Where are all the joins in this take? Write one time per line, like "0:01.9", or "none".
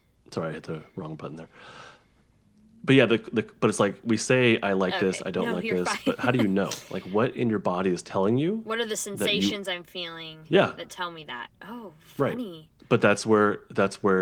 0:12.8